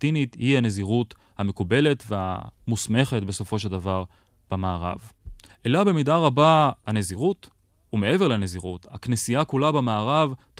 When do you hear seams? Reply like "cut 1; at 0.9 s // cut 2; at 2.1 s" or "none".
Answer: cut 1; at 5.5 s